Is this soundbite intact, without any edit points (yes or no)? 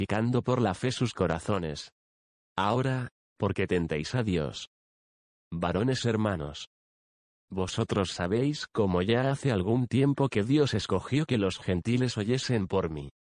no